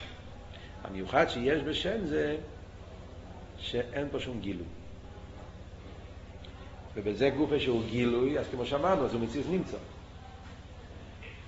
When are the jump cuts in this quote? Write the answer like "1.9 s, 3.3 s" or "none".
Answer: 6.9 s